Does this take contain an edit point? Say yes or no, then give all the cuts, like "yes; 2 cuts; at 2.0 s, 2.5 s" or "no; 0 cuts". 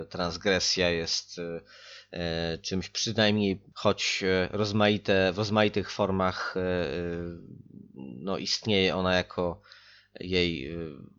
yes; 1 cut; at 3.7 s